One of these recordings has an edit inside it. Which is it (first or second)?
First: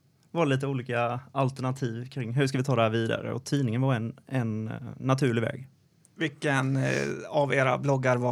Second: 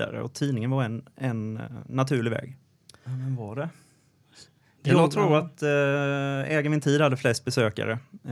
second